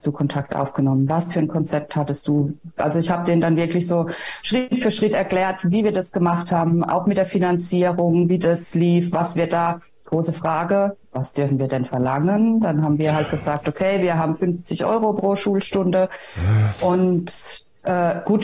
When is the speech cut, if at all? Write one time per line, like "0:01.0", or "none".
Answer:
0:11.0